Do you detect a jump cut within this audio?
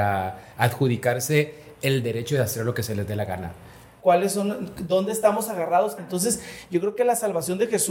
yes; 3 cuts; at 1.8 s, 4.0 s, 6.0 s

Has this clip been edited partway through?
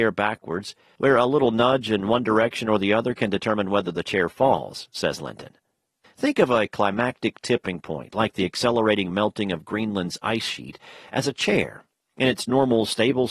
yes; 2 cuts; at 1.0 s, 6.0 s

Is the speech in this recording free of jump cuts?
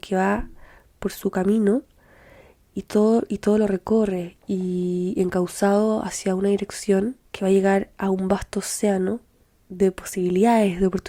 no; 3 cuts; at 2.7 s, 4.4 s, 7.3 s

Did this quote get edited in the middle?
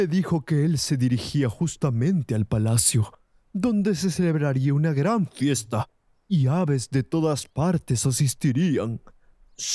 no; 0 cuts

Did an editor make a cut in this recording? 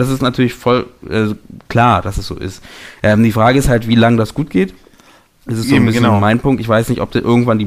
no; 0 cuts

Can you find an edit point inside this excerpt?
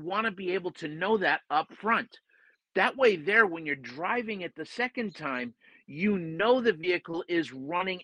no; 0 cuts

